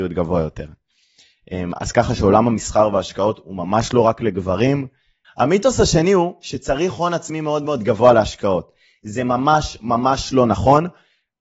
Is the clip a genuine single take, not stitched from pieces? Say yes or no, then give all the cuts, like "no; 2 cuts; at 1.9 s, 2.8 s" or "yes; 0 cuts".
yes; 0 cuts